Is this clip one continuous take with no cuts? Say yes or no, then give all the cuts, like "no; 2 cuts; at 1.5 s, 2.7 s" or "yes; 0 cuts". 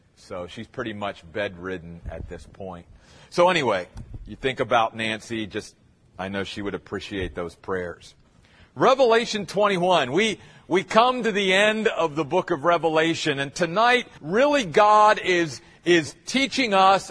no; 1 cut; at 14.2 s